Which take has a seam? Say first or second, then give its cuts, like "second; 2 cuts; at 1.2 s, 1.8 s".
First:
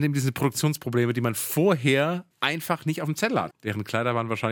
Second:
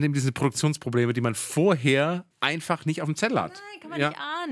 first; 1 cut; at 3.5 s